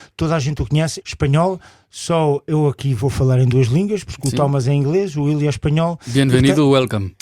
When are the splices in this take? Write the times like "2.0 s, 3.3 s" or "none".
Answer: 1.0 s